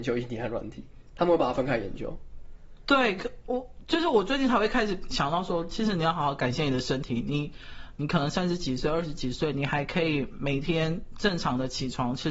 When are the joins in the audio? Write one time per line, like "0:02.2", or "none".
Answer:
none